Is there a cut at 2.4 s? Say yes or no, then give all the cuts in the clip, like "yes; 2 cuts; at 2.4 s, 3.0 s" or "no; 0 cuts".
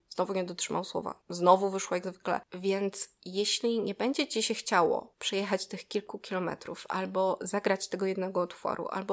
yes; 1 cut; at 2.4 s